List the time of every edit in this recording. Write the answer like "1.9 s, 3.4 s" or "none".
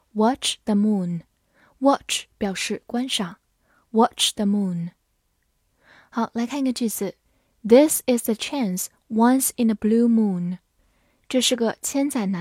none